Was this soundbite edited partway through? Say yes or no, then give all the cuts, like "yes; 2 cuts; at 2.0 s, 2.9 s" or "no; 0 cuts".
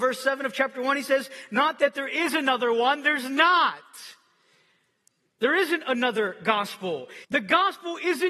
yes; 1 cut; at 7.2 s